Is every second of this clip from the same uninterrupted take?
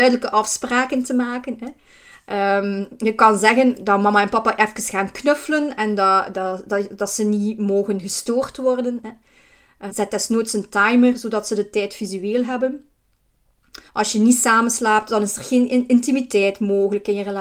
no; 2 cuts; at 9.9 s, 13.9 s

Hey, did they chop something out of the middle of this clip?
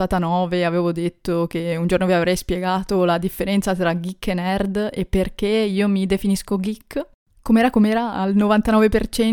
no; 0 cuts

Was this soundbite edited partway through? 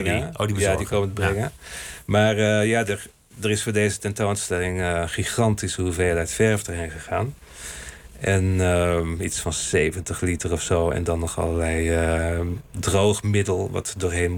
no; 0 cuts

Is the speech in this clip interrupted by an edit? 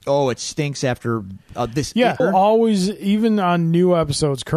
yes; 1 cut; at 2.2 s

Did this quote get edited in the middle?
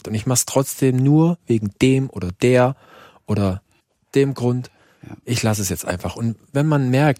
no; 0 cuts

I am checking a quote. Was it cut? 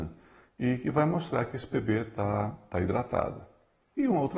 no; 0 cuts

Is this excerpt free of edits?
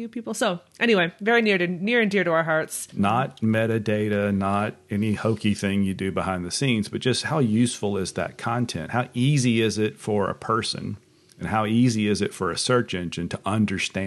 no; 1 cut; at 2.9 s

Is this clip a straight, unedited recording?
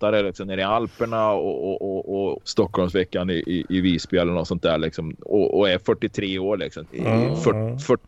no; 2 cuts; at 2.4 s, 6.9 s

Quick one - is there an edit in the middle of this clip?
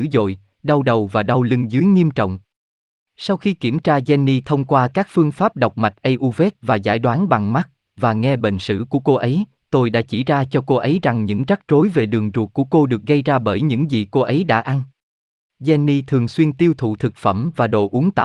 yes; 1 cut; at 7.9 s

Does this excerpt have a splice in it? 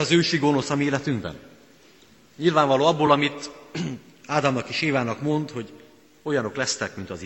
no; 0 cuts

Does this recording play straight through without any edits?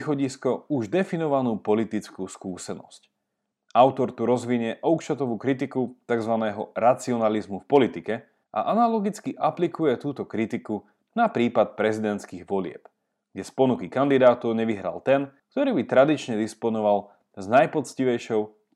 yes; 0 cuts

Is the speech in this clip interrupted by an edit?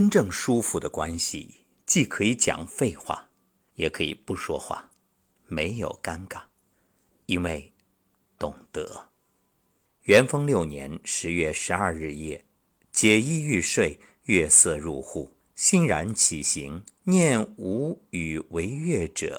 yes; 2 cuts; at 9.8 s, 17.0 s

